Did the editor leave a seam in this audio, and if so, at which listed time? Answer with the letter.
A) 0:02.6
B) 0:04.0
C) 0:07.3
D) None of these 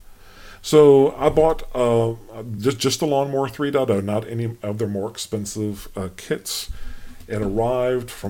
D